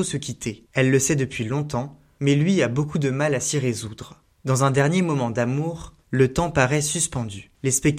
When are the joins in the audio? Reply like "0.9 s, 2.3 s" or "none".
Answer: 6.0 s

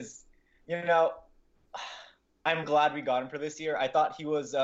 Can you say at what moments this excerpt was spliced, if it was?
2.6 s

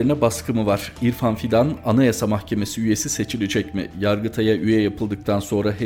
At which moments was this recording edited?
none

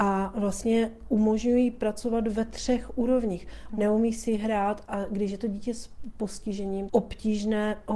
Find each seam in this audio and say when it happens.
3.7 s, 6.9 s

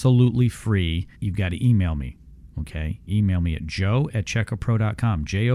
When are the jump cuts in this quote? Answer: 1.1 s

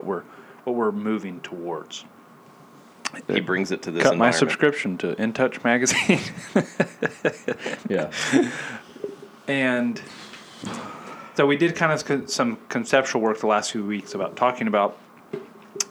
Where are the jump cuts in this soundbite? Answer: 3.3 s

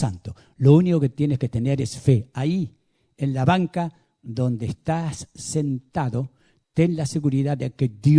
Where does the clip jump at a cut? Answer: none

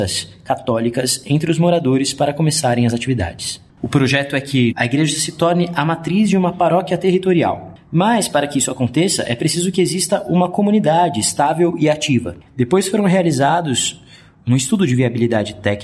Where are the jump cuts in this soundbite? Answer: 3.7 s, 4.7 s, 12.5 s

